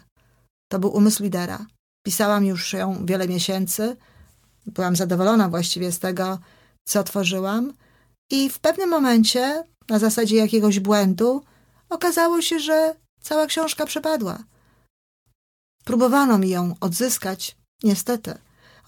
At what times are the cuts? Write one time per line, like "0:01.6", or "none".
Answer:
none